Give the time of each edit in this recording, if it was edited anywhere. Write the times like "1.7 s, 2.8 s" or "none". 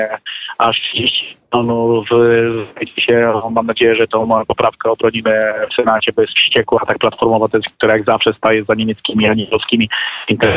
none